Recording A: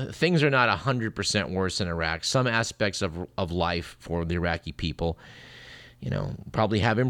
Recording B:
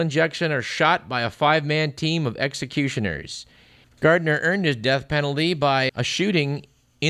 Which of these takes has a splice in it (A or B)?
B